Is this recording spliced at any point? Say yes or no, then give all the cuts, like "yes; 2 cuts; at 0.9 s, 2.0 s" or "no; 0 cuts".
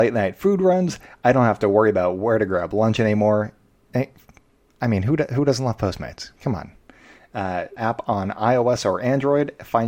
yes; 1 cut; at 7.8 s